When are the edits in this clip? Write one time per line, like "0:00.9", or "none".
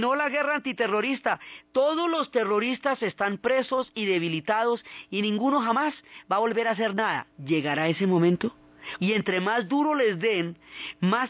0:07.3
0:09.0